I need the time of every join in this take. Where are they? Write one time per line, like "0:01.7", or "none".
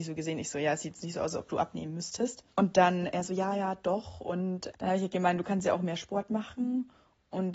none